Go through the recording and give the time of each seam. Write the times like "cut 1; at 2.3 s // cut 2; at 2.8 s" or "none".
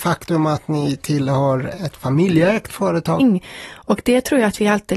cut 1; at 3.2 s